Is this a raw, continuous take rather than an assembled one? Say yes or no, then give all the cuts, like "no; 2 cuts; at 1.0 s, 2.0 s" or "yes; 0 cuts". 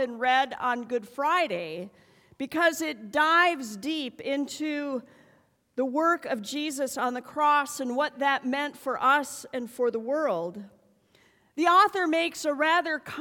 yes; 0 cuts